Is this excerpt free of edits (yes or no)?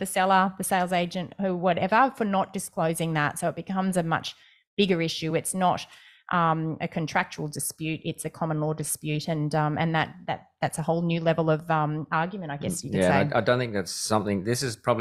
yes